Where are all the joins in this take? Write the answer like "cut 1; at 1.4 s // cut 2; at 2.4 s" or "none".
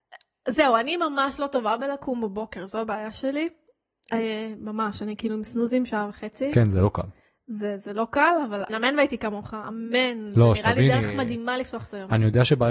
cut 1; at 8.7 s